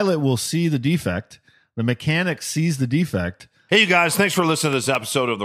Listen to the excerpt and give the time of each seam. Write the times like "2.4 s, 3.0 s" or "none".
3.7 s